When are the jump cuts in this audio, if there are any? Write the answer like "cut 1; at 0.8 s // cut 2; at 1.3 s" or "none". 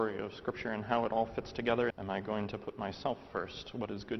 cut 1; at 1.9 s